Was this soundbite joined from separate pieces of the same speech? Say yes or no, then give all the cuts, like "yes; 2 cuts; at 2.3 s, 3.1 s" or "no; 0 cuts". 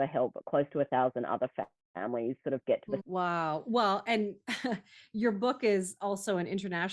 yes; 1 cut; at 3.0 s